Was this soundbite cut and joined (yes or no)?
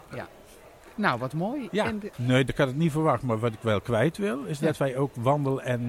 yes